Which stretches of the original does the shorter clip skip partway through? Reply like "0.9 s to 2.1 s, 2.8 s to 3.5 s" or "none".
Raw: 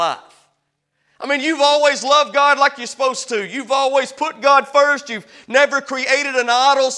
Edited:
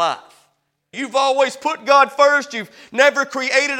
0.9 s to 3.5 s

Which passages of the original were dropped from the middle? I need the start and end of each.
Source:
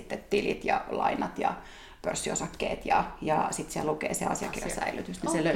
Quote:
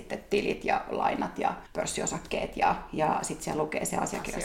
1.7 s to 1.9 s

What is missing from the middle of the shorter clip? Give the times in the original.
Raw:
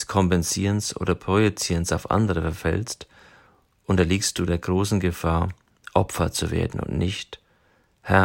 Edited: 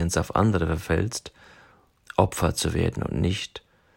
3.8 s to 5.8 s

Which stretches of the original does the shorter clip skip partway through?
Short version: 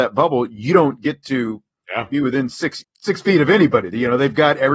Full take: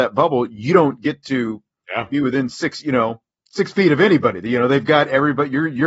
2.8 s to 3.3 s

